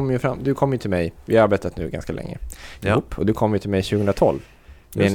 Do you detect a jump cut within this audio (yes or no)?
no